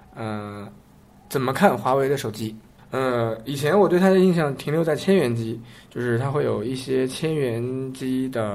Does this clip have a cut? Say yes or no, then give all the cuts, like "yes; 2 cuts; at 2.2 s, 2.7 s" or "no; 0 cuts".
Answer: yes; 1 cut; at 2.8 s